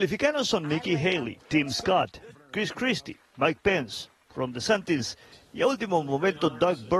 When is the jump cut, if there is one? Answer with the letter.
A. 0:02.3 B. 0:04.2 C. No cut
A